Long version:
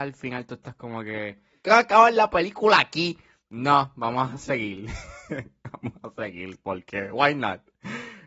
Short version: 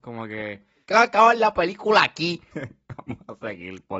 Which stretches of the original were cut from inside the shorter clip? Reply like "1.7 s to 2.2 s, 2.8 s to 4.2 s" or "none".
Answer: 3.3 s to 5.3 s